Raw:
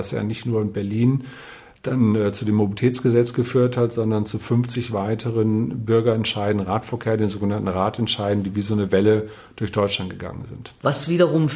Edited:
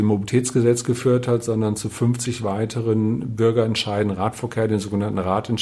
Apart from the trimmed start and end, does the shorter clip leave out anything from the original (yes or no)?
no